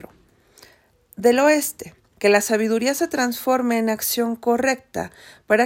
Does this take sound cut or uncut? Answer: cut